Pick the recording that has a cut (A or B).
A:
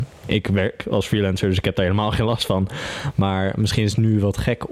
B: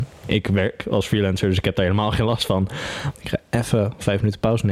B